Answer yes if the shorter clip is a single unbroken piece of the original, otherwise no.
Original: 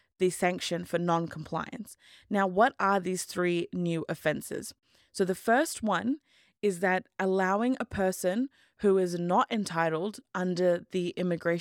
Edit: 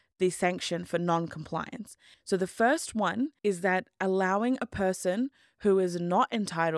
no